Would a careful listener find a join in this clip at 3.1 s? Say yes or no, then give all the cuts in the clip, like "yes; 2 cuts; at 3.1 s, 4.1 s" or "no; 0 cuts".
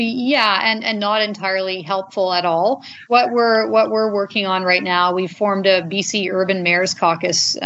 no; 0 cuts